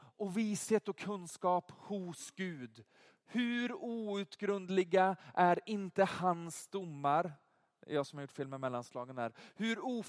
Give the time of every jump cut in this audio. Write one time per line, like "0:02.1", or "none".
none